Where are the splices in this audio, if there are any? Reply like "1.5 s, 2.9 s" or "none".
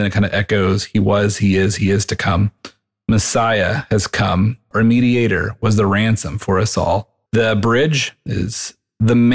4.7 s, 7.3 s